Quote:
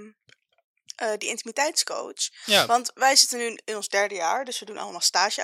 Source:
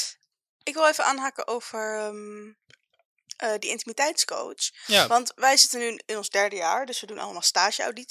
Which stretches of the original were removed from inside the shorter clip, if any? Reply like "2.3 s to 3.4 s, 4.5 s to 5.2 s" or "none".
none